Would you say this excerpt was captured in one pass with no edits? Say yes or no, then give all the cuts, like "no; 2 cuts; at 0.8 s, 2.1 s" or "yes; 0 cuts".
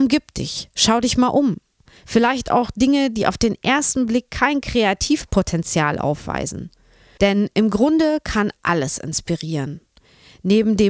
no; 1 cut; at 7.2 s